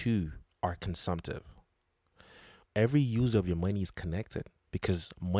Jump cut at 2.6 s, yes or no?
yes